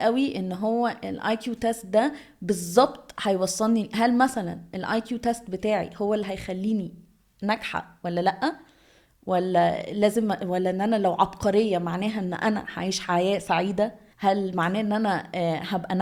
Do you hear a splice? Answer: yes; 1 cut; at 14.1 s

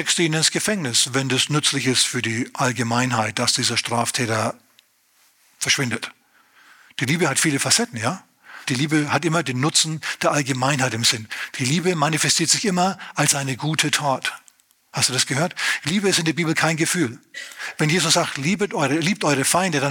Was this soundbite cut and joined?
yes; 1 cut; at 8.6 s

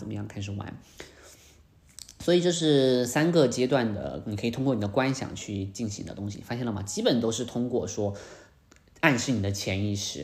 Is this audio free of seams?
yes; 0 cuts

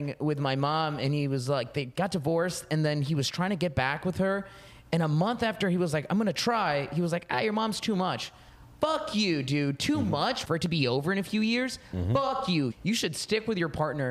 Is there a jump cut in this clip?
yes; 2 cuts; at 10.4 s, 12.7 s

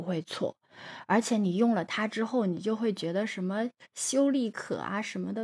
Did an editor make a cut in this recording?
no; 0 cuts

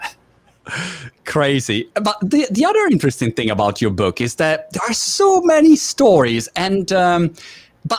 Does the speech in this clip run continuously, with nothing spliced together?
yes; 0 cuts

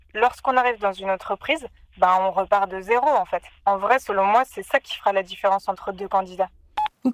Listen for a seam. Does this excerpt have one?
yes; 1 cut; at 3.5 s

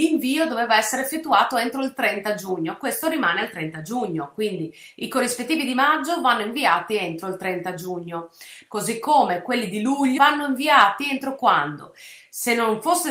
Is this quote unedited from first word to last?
no; 2 cuts; at 8.7 s, 10.2 s

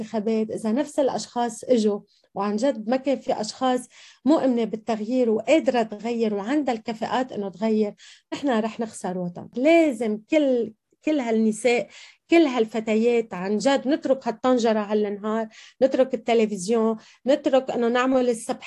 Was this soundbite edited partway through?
no; 0 cuts

